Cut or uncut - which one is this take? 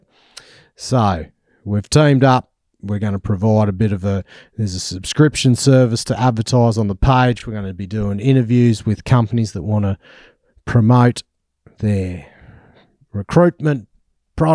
uncut